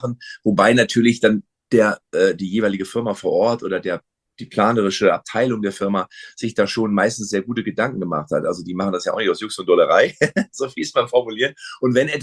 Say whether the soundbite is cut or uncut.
uncut